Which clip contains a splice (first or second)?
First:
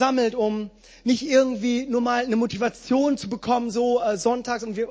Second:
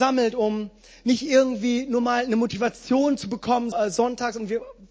second